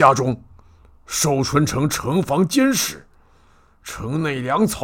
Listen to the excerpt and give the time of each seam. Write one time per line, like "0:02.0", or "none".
none